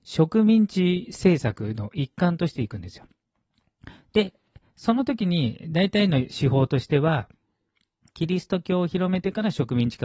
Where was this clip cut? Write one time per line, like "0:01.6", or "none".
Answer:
none